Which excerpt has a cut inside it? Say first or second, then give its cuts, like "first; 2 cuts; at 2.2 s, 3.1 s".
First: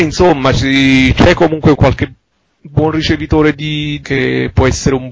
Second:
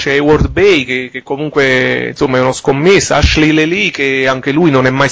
first; 2 cuts; at 1.8 s, 4.0 s